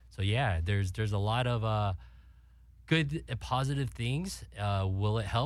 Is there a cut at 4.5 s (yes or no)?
no